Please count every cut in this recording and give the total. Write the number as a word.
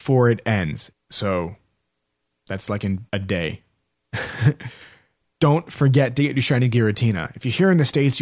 two